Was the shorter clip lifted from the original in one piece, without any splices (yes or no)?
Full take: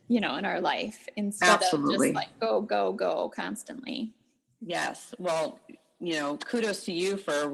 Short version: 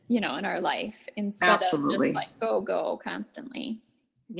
no